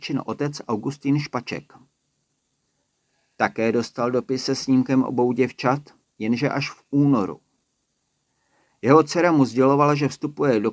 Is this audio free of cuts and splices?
yes; 0 cuts

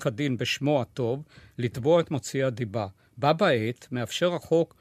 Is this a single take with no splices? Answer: yes; 0 cuts

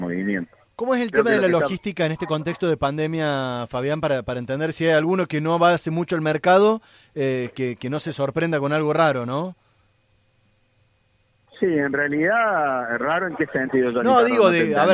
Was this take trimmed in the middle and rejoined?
no; 0 cuts

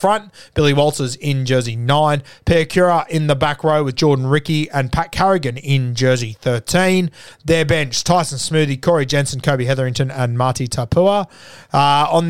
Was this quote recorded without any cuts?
yes; 0 cuts

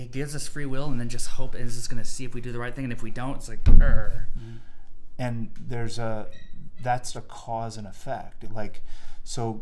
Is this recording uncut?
no; 3 cuts; at 4.4 s, 7.1 s, 8.4 s

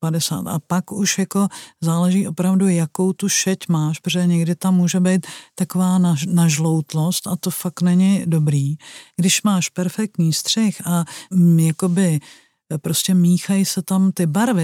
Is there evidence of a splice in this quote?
yes; 1 cut; at 11.3 s

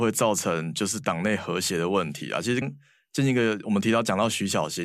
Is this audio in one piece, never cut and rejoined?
no; 1 cut; at 2.6 s

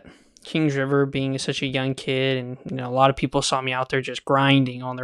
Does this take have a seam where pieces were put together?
no; 0 cuts

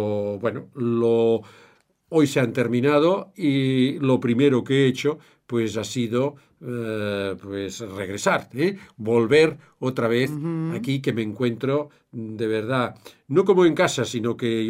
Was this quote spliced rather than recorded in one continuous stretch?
no; 0 cuts

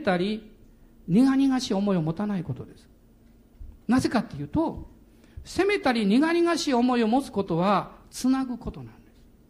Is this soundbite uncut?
no; 1 cut; at 3.8 s

